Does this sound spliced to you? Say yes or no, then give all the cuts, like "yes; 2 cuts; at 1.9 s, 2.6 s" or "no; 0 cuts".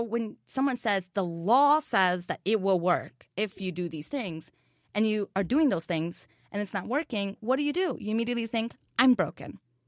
no; 0 cuts